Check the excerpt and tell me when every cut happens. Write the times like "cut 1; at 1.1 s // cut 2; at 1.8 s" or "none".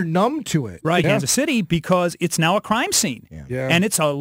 cut 1; at 1.0 s